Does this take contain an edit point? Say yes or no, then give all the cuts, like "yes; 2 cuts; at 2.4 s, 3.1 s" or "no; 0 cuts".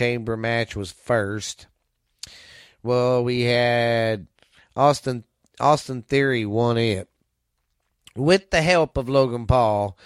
no; 0 cuts